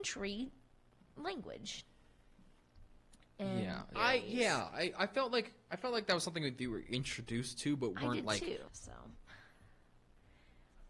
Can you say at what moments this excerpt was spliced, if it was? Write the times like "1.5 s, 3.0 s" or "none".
4.0 s, 8.7 s